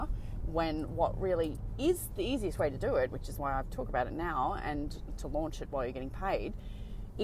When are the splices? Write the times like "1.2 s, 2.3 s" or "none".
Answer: none